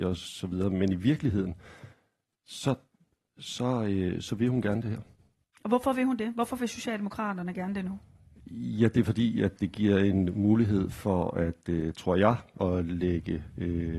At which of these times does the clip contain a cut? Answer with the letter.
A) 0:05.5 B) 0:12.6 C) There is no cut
B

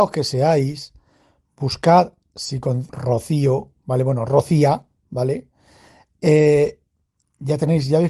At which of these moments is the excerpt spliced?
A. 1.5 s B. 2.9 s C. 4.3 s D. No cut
B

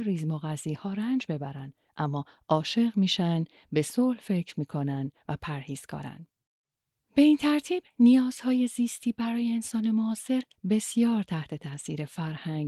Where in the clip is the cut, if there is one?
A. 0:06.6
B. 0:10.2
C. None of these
C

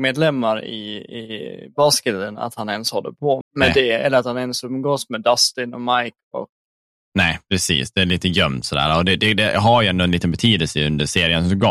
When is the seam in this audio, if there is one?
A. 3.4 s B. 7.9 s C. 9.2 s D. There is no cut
A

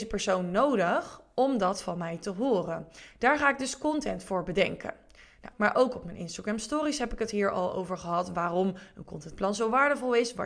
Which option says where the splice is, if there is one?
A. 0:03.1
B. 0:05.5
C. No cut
B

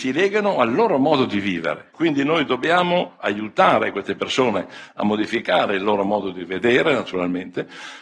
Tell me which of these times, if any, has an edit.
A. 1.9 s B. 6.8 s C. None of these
A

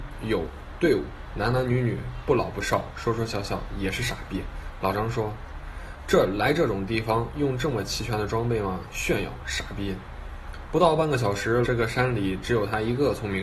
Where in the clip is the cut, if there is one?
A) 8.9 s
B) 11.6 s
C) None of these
B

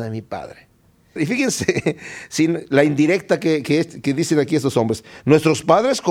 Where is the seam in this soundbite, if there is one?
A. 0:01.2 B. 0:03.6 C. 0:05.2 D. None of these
A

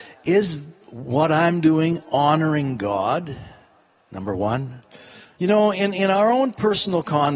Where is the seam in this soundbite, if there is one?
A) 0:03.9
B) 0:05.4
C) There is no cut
B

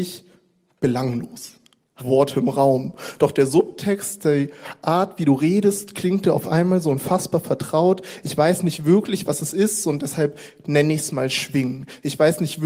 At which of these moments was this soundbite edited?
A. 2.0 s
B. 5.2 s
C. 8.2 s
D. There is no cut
A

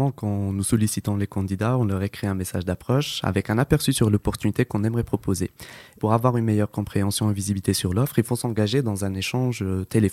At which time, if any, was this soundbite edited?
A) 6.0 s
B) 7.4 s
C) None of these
A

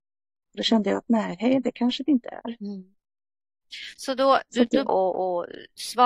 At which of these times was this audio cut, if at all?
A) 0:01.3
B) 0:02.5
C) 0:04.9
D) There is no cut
C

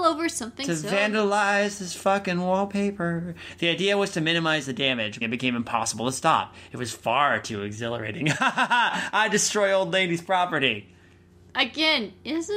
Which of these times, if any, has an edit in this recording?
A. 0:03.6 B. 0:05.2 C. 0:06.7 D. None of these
B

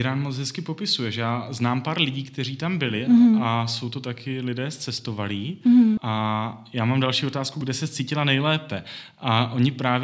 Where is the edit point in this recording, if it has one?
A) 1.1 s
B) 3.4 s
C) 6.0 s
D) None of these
C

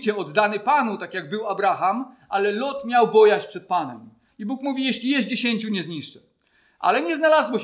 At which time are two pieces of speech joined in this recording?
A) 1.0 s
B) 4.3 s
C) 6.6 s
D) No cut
B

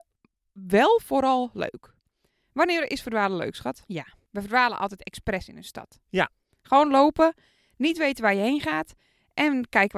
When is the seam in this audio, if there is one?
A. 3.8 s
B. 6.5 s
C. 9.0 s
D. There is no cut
A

